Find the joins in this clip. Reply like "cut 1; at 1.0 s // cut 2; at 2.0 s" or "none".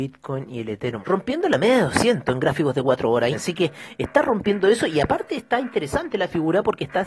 cut 1; at 1.0 s // cut 2; at 3.3 s

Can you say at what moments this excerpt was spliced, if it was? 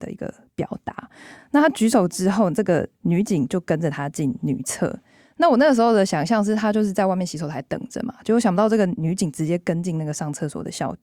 cut 1; at 1.4 s

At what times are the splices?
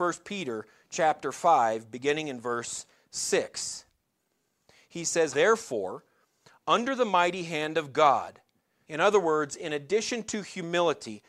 cut 1; at 5.3 s // cut 2; at 8.8 s

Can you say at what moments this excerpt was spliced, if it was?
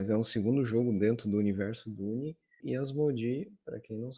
cut 1; at 2.6 s

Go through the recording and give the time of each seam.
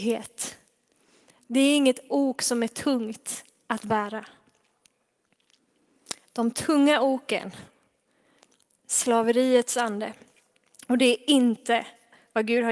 none

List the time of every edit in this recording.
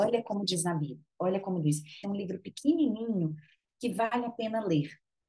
cut 1; at 2.0 s

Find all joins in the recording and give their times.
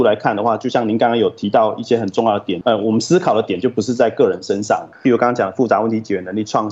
cut 1; at 2.6 s // cut 2; at 4.9 s

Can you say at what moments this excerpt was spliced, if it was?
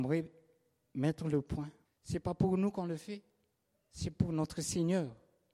cut 1; at 1.9 s

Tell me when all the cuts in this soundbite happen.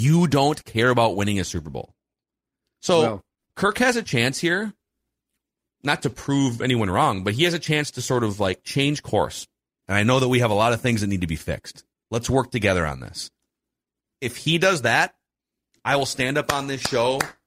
cut 1; at 9.8 s

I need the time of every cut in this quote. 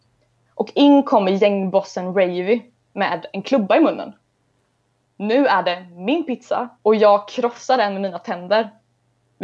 cut 1; at 5.0 s // cut 2; at 6.7 s

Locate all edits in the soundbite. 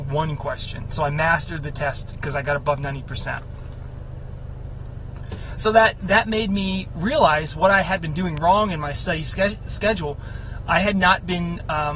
none

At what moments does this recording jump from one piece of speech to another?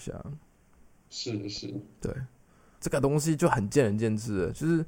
cut 1; at 2.8 s

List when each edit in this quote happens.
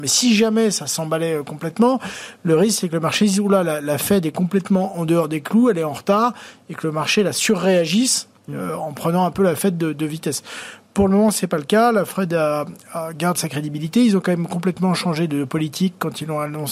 none

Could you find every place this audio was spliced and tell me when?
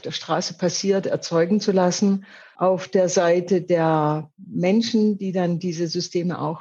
none

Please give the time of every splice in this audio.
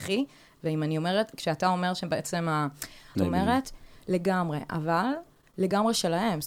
cut 1; at 3.1 s

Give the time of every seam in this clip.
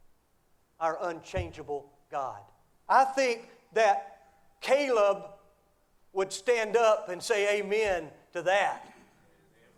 cut 1; at 2.9 s

